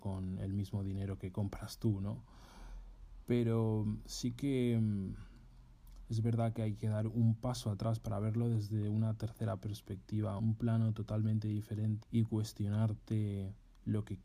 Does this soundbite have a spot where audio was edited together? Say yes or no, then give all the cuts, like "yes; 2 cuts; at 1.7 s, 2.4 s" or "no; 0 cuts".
yes; 2 cuts; at 10.4 s, 12.0 s